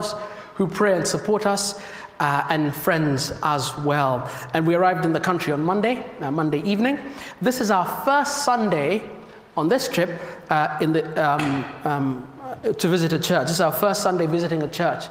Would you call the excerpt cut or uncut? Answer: uncut